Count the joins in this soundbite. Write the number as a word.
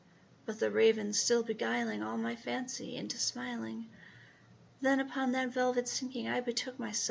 one